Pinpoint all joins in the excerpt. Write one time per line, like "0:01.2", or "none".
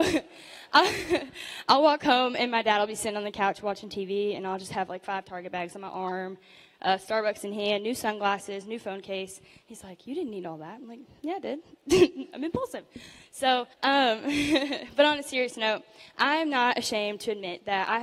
0:13.7